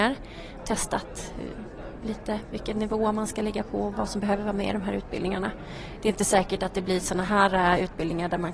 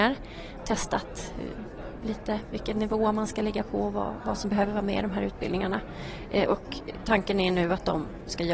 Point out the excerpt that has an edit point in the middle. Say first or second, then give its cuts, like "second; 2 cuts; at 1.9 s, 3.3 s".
first; 2 cuts; at 3.9 s, 6.0 s